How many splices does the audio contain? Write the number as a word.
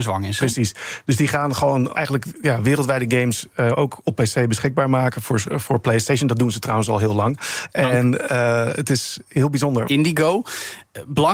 three